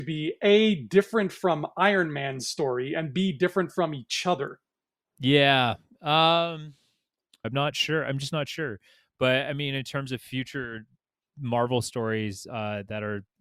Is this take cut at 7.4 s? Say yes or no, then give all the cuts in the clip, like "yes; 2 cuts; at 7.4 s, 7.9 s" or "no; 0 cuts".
yes; 1 cut; at 7.4 s